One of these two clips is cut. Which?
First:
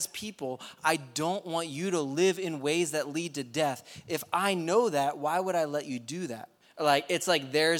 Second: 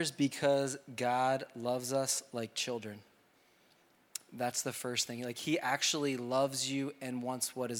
first; 1 cut; at 6.6 s

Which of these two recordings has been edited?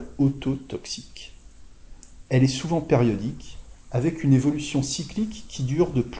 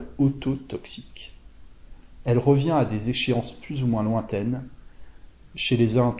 second; 1 cut; at 2.2 s

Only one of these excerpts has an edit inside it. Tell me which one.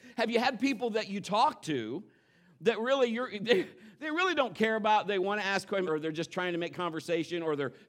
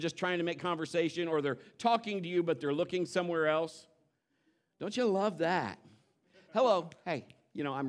first; 1 cut; at 5.9 s

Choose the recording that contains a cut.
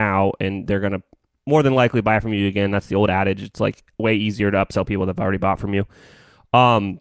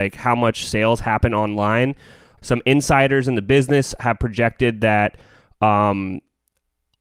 second; 1 cut; at 2.4 s

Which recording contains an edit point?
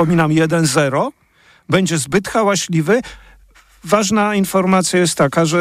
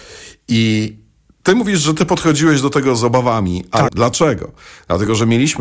second; 1 cut; at 3.9 s

